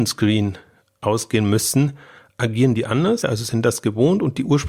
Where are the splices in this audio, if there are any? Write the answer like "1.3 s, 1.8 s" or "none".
3.2 s

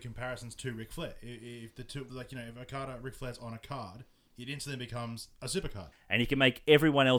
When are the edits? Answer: 2.1 s, 5.9 s

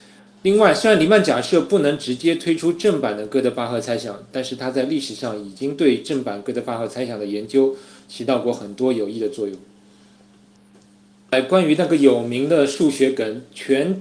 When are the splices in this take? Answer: none

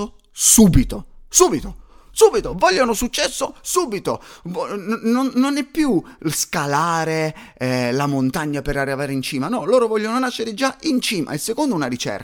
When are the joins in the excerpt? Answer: none

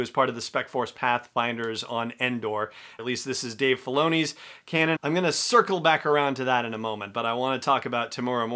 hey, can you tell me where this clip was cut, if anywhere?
3.0 s, 5.0 s

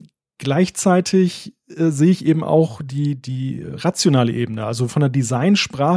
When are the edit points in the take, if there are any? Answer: none

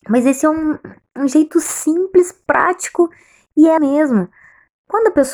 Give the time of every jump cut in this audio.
3.8 s

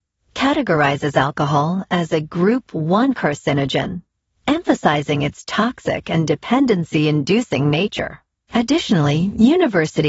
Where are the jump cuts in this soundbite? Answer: 8.5 s

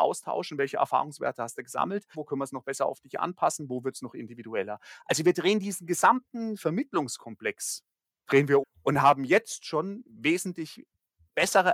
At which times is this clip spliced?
2.1 s, 8.6 s

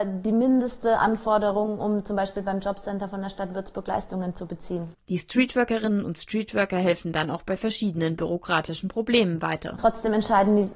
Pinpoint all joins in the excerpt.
none

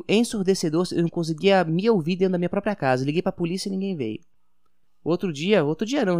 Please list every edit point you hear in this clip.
4.8 s

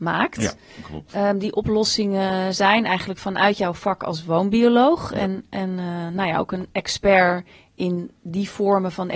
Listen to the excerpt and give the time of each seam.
none

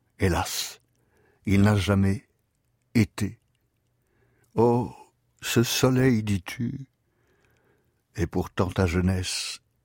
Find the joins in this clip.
none

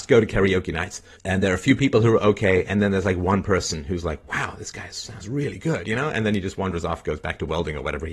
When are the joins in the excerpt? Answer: 1.1 s

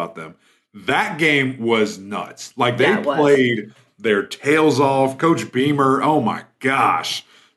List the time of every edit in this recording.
none

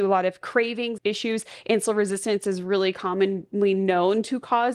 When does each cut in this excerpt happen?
1.0 s

